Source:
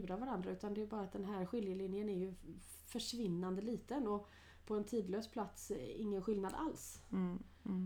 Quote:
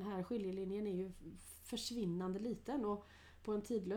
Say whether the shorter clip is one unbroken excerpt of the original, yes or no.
yes